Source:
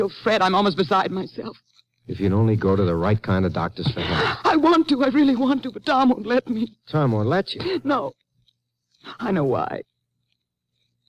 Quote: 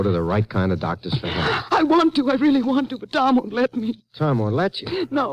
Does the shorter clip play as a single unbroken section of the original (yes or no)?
yes